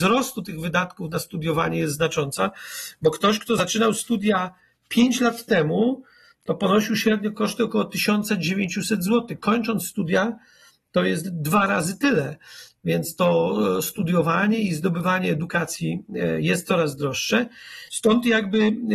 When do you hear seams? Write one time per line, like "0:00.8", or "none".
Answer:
0:17.9